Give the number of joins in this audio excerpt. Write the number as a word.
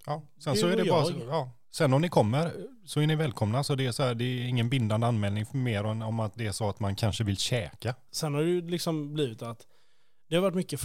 one